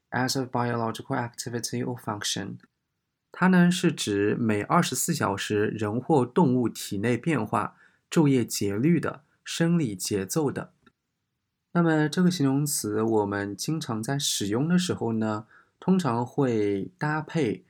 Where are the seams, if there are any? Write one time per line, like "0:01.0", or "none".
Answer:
none